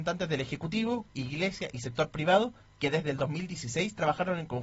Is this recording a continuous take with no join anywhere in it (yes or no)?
no